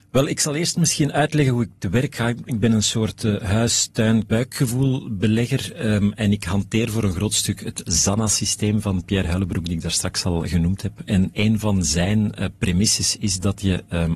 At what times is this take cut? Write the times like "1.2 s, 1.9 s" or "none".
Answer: 4.3 s